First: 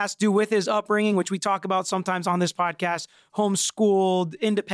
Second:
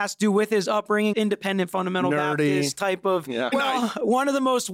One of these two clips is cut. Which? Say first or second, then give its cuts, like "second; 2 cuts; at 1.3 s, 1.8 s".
second; 2 cuts; at 1.1 s, 3.5 s